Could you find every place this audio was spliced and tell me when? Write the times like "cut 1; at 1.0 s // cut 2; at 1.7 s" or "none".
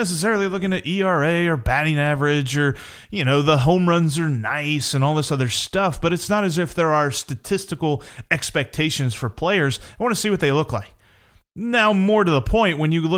none